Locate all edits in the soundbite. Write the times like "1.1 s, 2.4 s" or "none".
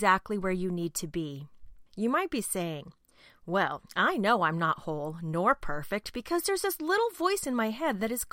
1.9 s